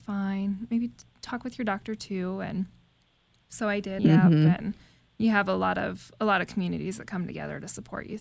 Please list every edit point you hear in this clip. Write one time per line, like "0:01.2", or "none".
0:04.0